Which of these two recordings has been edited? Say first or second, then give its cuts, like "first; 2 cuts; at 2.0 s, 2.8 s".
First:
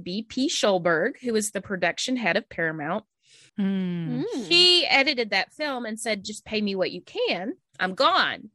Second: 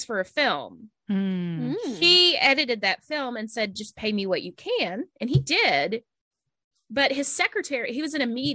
first; 2 cuts; at 3.5 s, 7.6 s